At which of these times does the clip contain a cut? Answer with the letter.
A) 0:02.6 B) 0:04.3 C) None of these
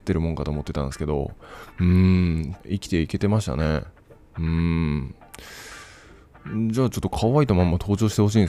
A